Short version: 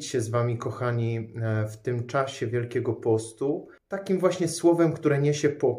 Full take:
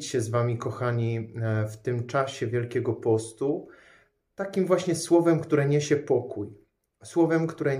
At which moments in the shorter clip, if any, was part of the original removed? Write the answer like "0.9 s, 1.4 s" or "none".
3.8 s